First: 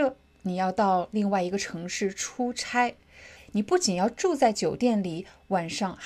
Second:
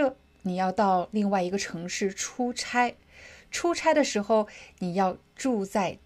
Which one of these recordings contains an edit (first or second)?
first